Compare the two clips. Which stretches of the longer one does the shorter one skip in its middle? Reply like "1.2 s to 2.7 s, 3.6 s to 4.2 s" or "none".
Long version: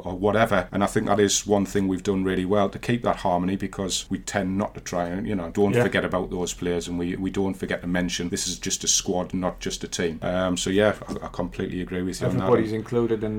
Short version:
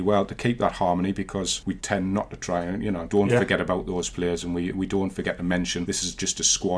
none